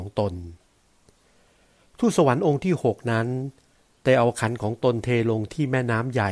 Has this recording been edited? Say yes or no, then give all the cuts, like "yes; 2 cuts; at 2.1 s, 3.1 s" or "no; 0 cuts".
no; 0 cuts